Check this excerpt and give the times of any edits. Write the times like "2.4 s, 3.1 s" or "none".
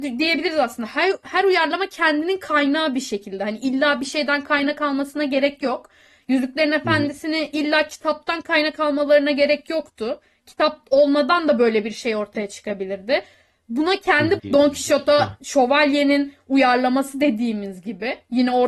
14.4 s

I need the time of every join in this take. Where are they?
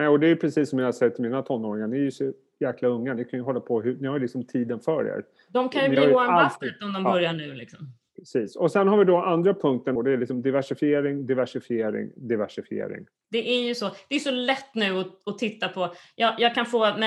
10.0 s, 13.2 s

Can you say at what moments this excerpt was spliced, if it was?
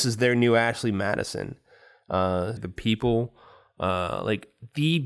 2.6 s

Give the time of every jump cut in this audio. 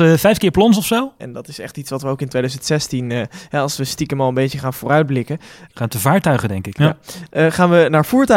1.2 s, 5.7 s, 6.8 s

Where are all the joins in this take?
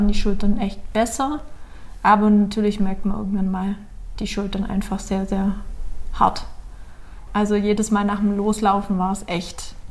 7.3 s

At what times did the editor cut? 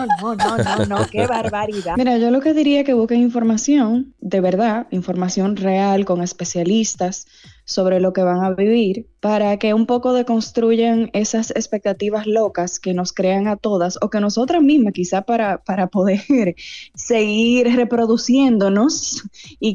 1.9 s

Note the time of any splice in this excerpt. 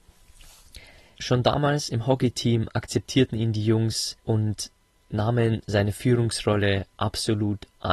1.2 s, 4.2 s

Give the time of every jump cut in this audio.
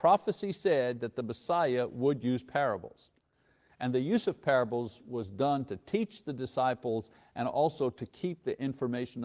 none

